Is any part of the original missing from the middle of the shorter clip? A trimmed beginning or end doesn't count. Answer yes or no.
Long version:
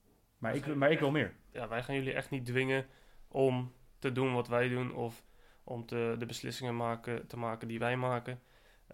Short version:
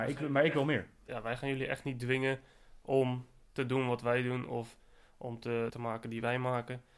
yes